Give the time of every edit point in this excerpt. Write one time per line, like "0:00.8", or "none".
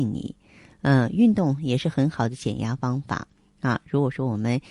none